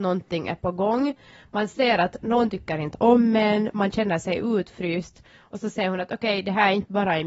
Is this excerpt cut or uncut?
uncut